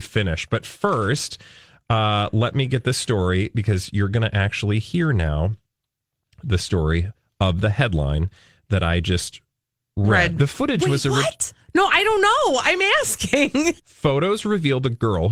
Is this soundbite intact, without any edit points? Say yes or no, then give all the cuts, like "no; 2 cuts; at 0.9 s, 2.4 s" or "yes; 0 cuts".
no; 2 cuts; at 10.4 s, 13.8 s